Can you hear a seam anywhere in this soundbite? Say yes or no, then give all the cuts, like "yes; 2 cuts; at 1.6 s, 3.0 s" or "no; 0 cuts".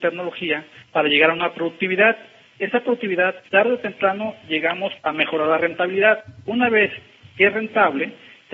yes; 1 cut; at 3.4 s